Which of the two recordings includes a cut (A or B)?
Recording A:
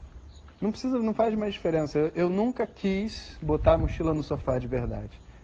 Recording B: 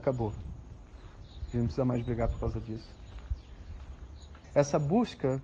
B